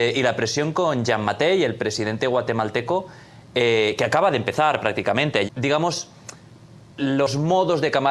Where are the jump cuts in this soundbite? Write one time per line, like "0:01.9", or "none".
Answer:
0:05.5